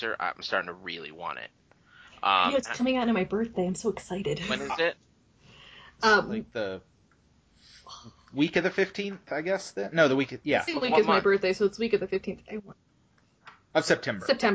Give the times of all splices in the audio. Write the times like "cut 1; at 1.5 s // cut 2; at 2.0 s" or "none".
none